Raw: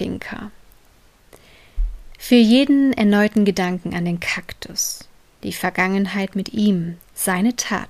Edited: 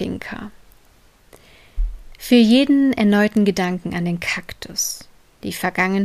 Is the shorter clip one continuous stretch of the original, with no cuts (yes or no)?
yes